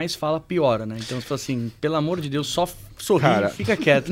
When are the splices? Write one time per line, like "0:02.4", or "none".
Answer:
none

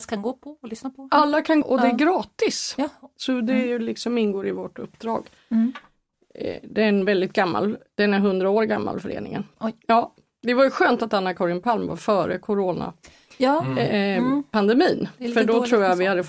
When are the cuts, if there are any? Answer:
0:01.6
0:09.8

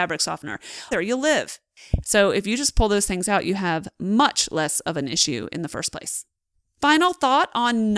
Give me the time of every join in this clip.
0:00.9
0:02.0

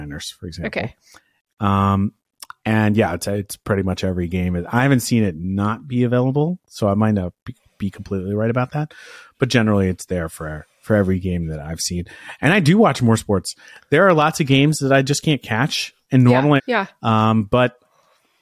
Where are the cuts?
0:16.6

